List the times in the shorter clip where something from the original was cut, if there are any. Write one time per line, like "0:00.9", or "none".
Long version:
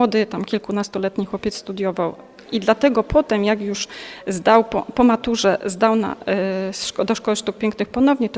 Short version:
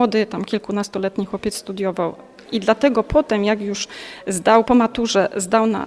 0:04.6